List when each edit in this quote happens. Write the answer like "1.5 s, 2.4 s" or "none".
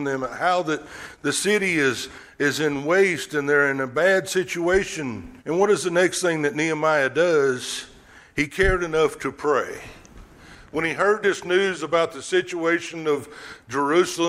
5.4 s